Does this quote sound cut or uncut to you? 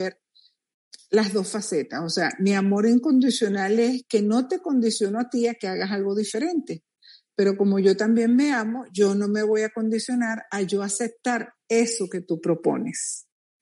uncut